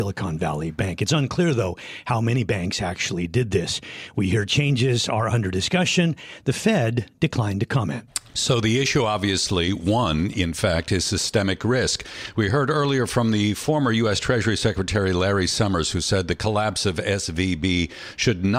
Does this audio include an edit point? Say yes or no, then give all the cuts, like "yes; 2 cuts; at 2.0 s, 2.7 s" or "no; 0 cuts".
no; 0 cuts